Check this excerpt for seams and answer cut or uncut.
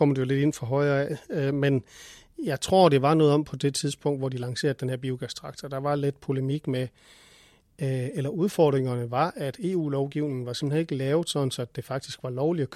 uncut